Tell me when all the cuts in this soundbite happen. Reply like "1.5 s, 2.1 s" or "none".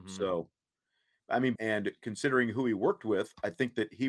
1.6 s